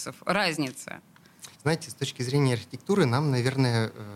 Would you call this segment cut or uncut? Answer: cut